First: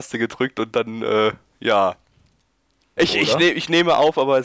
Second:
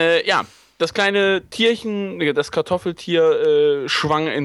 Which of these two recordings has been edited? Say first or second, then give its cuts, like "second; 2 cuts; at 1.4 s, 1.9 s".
first; 1 cut; at 3.0 s